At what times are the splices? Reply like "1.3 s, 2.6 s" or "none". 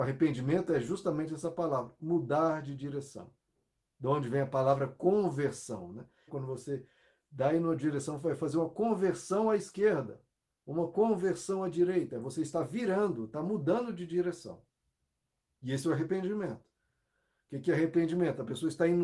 6.3 s, 17.4 s